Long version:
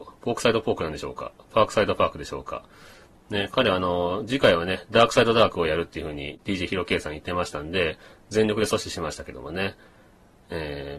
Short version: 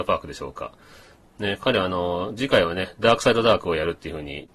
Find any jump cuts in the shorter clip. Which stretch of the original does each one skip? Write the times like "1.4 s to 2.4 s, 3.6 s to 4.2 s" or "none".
none